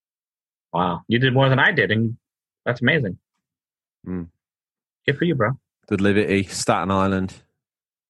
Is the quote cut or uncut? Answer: uncut